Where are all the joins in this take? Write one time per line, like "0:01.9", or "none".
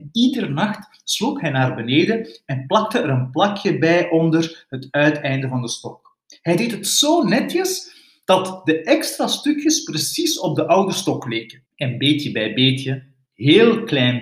0:11.7